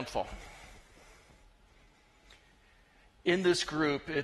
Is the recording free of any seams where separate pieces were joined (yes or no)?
yes